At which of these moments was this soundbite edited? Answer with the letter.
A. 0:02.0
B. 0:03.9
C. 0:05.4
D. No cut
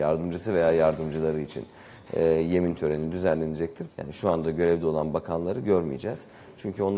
B